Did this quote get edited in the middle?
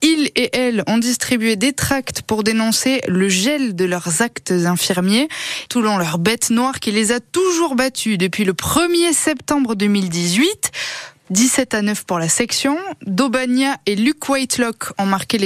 yes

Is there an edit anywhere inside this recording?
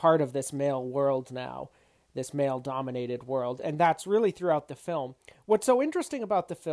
no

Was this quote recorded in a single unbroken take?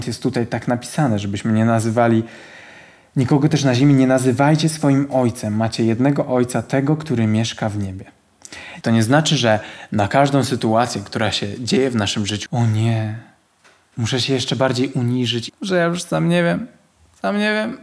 no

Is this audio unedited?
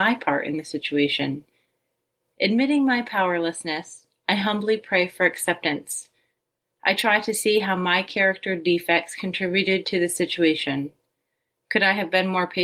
yes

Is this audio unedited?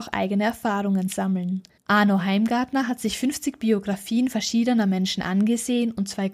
no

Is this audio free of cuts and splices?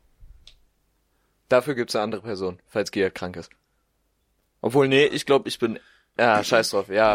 yes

